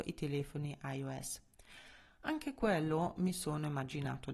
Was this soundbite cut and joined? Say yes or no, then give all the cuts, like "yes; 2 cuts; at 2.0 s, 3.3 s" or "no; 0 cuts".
no; 0 cuts